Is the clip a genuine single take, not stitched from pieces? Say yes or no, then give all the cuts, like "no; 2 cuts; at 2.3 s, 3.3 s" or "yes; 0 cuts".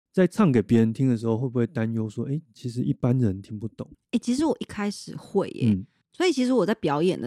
yes; 0 cuts